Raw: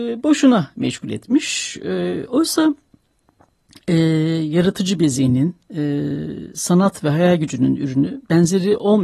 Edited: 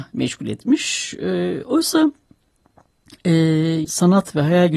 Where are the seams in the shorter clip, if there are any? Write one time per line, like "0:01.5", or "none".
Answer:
0:03.8